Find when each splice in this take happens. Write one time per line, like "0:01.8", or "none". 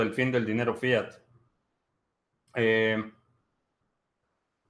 none